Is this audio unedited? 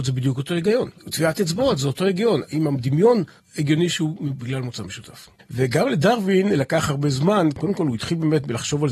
no; 1 cut; at 3.4 s

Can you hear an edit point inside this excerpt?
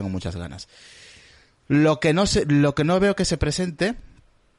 no; 0 cuts

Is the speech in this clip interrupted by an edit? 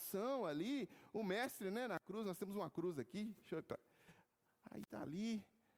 no; 0 cuts

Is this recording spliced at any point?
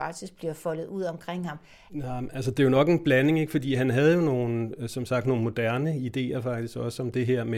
yes; 1 cut; at 1.9 s

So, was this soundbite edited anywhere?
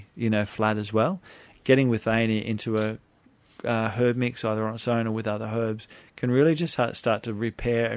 no; 0 cuts

